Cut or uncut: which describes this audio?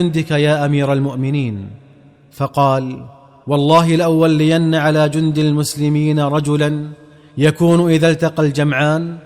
uncut